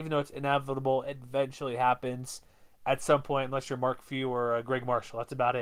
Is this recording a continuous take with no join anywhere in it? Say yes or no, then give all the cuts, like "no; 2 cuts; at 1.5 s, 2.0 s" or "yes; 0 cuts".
yes; 0 cuts